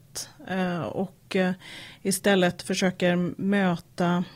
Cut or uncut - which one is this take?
uncut